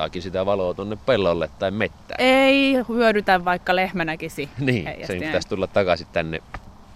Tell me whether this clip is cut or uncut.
uncut